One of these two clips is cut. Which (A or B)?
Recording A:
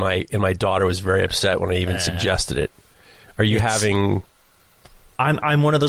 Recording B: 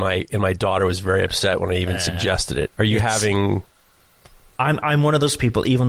B